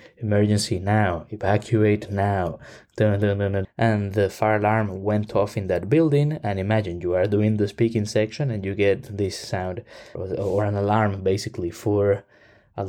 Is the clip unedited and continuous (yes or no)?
no